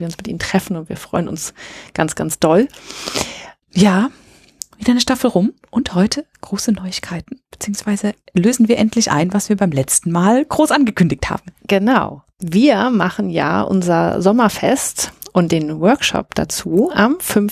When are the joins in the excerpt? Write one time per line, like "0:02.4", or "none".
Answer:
0:03.6